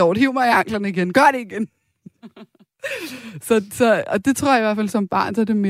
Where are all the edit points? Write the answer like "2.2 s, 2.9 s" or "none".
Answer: none